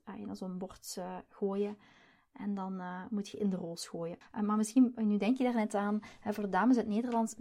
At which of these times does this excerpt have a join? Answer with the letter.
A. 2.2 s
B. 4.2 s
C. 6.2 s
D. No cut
B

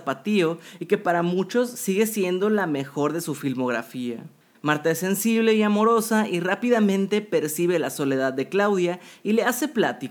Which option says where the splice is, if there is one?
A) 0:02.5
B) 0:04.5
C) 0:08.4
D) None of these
B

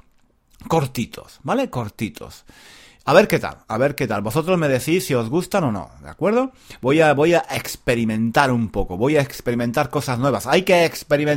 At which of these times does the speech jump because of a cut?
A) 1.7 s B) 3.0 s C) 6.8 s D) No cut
D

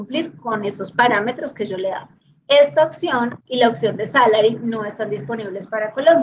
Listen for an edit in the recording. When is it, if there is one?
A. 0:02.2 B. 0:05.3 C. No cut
C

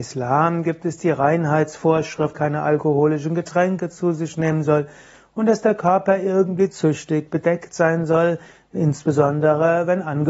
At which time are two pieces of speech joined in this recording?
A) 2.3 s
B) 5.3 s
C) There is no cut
A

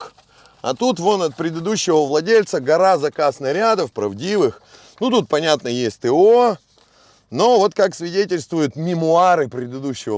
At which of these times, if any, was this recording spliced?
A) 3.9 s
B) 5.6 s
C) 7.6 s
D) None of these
A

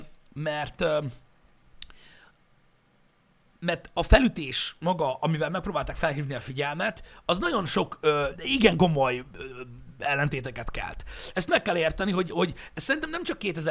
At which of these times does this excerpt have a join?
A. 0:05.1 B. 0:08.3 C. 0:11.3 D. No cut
B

